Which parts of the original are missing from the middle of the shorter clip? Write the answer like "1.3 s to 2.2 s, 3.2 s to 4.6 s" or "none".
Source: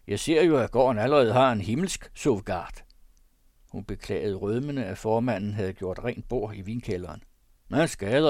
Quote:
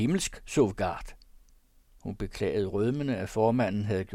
none